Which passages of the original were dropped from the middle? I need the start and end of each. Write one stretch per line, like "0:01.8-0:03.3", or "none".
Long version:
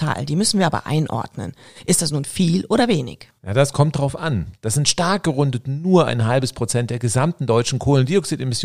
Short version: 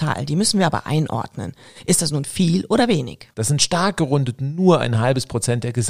0:03.3-0:04.6